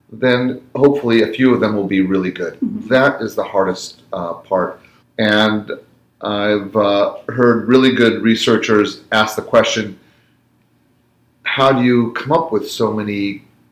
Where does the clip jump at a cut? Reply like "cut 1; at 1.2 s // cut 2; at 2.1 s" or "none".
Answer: cut 1; at 5.0 s